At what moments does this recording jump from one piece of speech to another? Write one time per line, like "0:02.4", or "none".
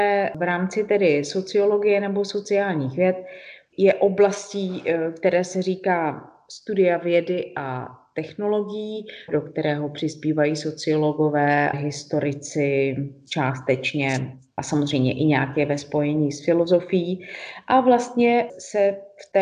0:03.7
0:09.3
0:11.7